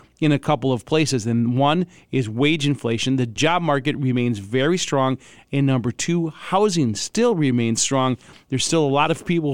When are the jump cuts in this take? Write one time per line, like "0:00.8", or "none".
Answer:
none